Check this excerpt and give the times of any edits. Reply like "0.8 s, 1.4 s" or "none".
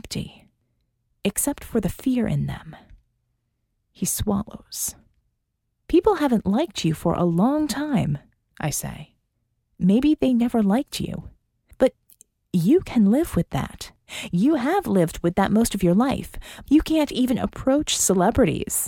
16.7 s